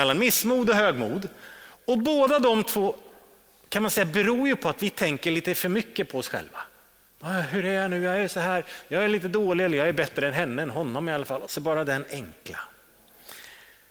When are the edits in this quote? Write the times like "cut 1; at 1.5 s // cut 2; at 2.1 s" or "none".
cut 1; at 11.4 s